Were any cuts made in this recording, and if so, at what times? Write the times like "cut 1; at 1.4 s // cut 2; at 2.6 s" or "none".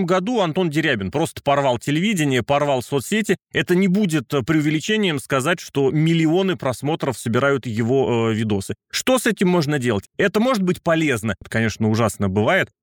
cut 1; at 10.1 s // cut 2; at 11.4 s